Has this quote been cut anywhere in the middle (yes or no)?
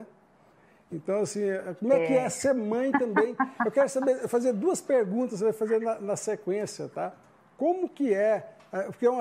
no